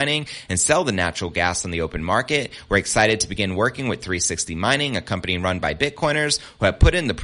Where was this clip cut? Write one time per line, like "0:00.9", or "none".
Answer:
none

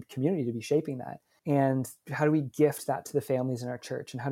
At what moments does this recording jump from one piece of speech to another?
0:01.4

